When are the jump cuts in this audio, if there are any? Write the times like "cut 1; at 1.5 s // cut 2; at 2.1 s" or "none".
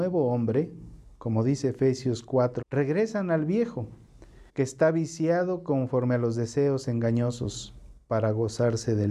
cut 1; at 2.6 s // cut 2; at 4.5 s